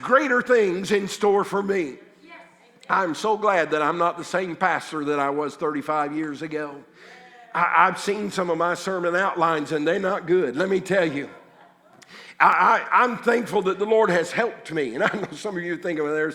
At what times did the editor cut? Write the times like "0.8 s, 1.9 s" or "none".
none